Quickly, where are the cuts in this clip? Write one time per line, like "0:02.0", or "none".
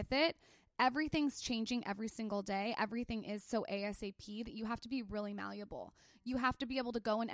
none